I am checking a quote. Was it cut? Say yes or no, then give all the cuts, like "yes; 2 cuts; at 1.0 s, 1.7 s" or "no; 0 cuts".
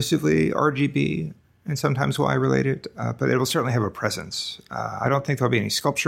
no; 0 cuts